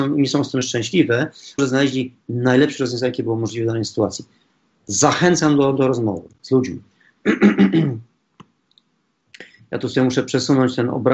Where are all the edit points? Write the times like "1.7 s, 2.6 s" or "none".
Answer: 1.6 s